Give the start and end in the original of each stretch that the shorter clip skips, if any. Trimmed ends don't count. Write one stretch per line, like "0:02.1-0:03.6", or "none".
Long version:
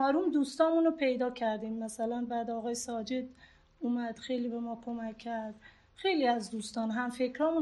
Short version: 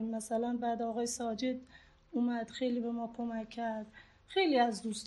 none